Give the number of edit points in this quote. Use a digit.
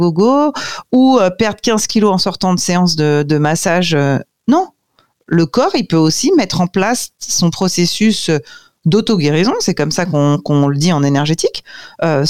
0